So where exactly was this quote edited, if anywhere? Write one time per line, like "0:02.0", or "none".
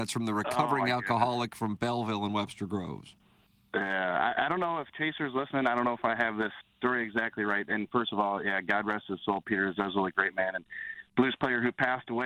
0:06.6